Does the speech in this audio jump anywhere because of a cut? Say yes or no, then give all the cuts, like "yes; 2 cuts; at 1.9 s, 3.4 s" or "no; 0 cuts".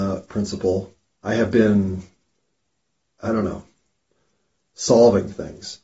yes; 1 cut; at 1.2 s